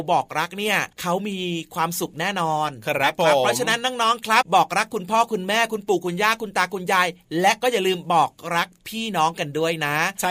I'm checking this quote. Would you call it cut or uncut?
cut